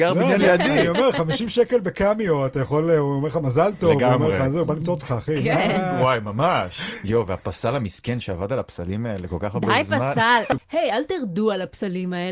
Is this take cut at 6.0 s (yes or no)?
no